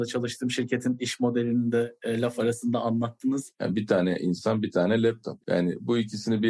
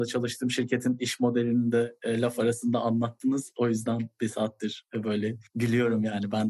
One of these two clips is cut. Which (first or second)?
first